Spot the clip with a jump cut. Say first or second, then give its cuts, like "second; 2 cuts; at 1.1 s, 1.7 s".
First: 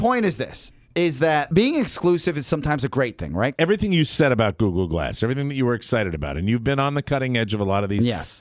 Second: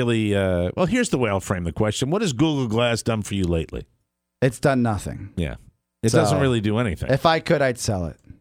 first; 1 cut; at 3.5 s